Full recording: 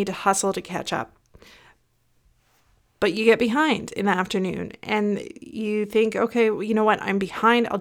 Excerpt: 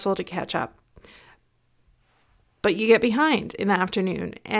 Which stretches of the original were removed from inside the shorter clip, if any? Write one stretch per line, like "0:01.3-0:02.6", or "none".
none